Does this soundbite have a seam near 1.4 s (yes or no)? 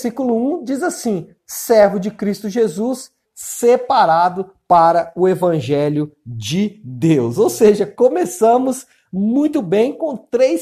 yes